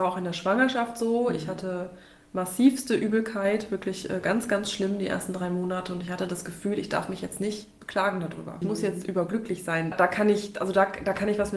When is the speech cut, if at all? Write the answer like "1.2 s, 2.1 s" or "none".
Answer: 8.6 s, 9.9 s